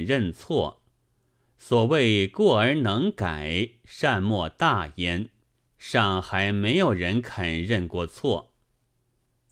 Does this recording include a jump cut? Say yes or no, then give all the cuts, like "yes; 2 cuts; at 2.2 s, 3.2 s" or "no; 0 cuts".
yes; 1 cut; at 5.7 s